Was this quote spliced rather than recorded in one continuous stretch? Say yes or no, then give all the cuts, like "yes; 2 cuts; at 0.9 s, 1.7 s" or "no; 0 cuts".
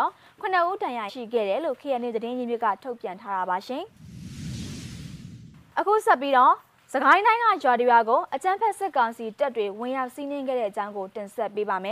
yes; 1 cut; at 1.1 s